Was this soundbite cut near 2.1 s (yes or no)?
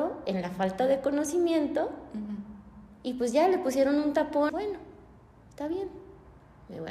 no